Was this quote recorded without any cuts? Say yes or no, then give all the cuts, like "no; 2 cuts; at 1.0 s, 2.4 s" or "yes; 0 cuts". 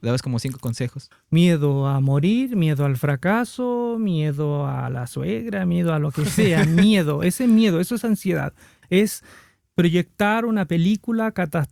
no; 2 cuts; at 1.1 s, 8.8 s